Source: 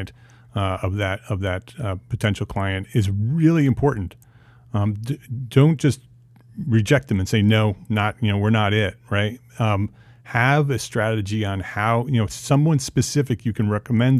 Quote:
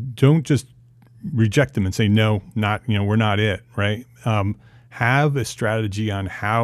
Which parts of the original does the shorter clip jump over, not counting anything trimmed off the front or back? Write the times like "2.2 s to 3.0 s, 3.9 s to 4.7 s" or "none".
none